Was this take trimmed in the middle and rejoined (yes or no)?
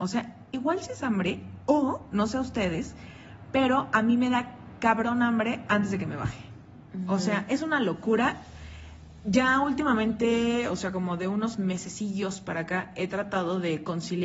no